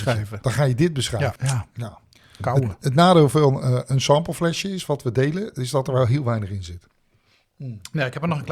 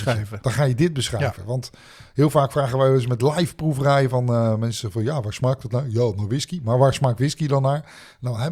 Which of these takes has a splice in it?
first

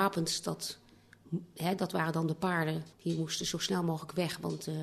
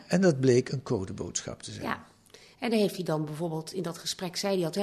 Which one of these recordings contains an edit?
first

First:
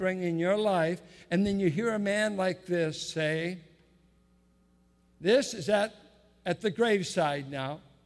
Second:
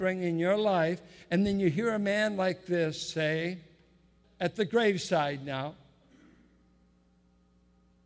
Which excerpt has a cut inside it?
second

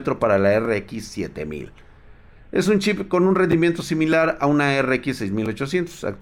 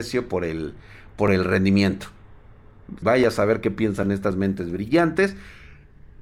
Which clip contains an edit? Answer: second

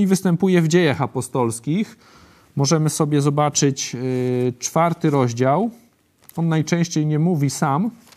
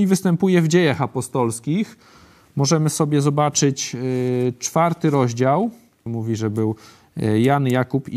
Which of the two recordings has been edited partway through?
second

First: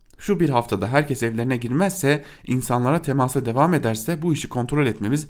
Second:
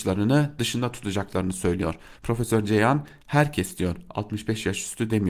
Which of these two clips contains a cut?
second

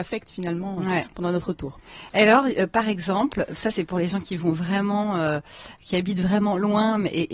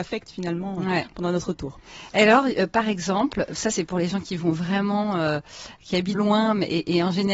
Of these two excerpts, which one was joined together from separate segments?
second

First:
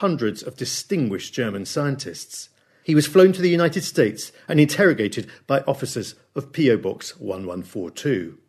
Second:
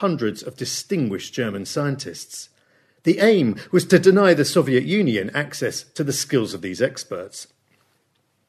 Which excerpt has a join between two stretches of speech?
first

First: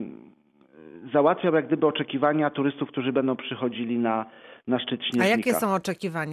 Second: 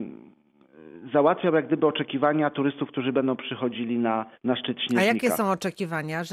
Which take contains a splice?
second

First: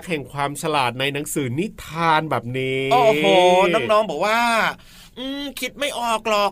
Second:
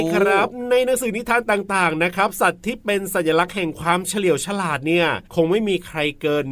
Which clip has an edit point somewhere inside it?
second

